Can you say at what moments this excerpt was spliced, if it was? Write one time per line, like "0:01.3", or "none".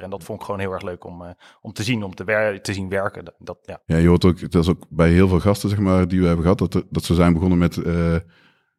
none